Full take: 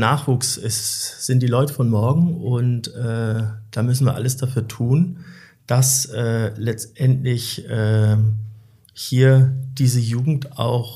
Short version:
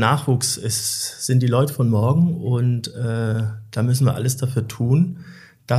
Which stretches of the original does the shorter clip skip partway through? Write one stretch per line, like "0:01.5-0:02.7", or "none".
none